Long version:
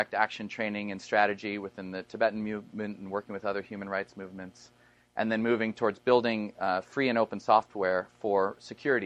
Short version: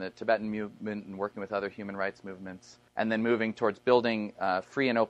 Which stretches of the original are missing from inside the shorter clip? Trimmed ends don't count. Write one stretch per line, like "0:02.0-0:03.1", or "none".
0:04.8-0:05.1